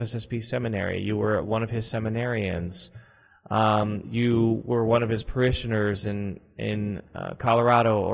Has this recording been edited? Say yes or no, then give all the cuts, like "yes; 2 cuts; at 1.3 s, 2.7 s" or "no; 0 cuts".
no; 0 cuts